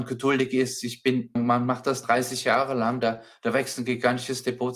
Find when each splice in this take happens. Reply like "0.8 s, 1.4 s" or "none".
1.4 s